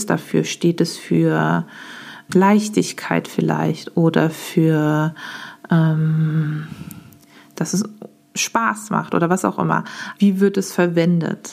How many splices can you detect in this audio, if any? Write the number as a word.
two